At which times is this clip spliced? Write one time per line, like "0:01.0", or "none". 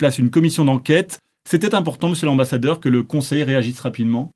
none